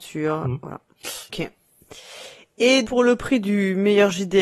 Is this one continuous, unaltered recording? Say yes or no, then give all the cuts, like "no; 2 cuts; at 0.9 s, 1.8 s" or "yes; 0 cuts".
no; 2 cuts; at 1.3 s, 2.8 s